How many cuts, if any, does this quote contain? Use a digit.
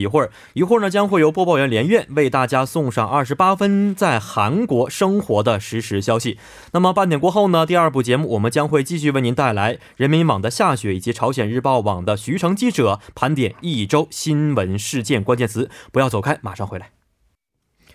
0